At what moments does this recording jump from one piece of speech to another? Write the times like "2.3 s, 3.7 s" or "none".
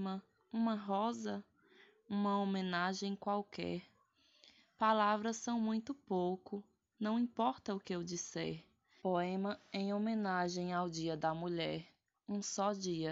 9.0 s